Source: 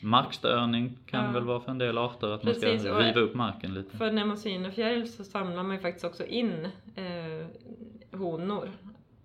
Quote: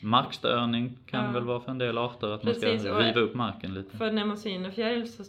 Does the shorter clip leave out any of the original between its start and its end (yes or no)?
no